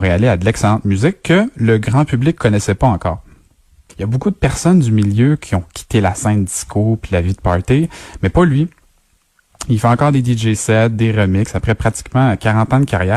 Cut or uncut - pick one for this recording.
cut